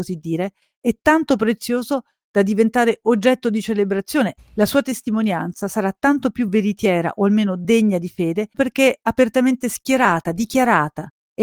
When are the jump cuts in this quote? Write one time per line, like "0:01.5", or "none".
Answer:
0:04.4
0:08.5